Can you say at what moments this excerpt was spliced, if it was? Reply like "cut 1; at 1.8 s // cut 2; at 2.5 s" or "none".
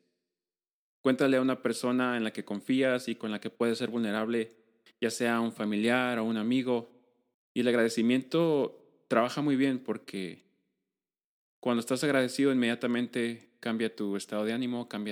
cut 1; at 7.3 s